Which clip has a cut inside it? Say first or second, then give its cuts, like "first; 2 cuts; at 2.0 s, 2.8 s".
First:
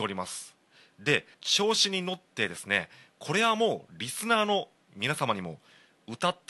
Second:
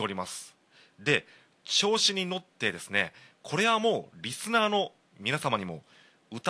first; 1 cut; at 1.3 s